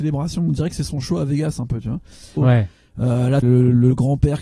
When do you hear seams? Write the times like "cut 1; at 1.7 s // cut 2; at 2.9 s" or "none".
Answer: cut 1; at 2.4 s // cut 2; at 3.4 s